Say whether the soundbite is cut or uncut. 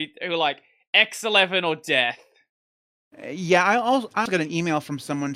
cut